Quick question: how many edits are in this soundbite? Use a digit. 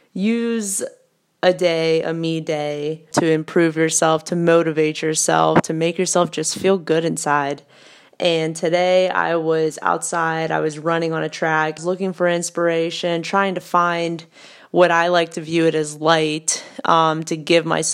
2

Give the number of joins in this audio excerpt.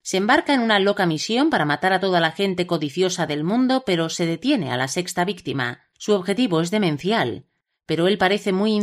1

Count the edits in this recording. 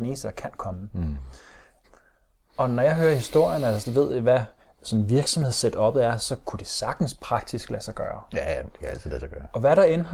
1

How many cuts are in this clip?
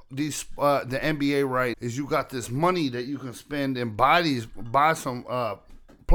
1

